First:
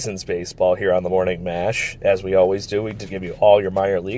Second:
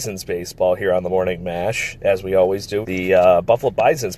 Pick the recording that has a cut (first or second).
second